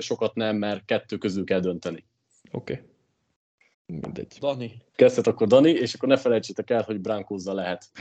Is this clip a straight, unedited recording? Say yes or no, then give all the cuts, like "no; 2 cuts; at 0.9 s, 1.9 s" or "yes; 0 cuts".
no; 2 cuts; at 3.7 s, 4.9 s